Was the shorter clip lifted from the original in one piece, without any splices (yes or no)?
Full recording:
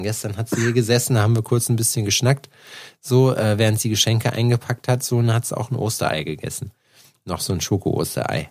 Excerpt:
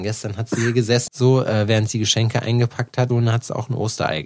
no